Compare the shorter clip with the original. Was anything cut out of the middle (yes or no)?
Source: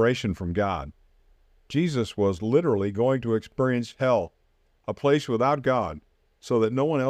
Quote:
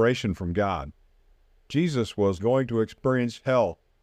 yes